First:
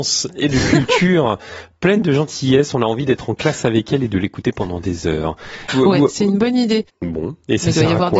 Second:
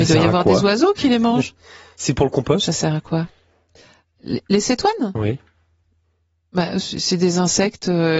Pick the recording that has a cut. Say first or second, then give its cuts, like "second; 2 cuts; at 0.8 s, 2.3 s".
first; 2 cuts; at 5.7 s, 6.9 s